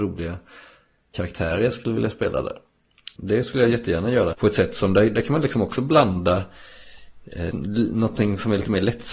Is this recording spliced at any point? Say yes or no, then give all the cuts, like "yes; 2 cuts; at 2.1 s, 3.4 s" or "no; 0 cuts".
yes; 3 cuts; at 3.2 s, 4.3 s, 7.5 s